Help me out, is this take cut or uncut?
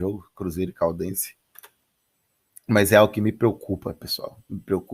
uncut